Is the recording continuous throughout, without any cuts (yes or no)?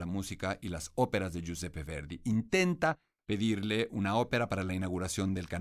yes